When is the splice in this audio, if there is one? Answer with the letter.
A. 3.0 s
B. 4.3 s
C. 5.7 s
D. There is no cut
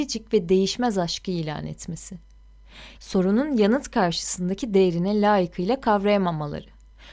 A